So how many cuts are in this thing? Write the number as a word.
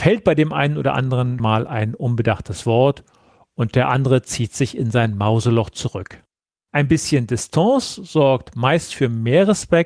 two